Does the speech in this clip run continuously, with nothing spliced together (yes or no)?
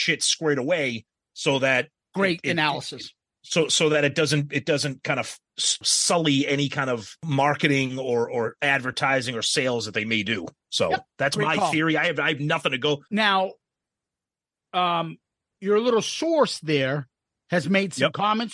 no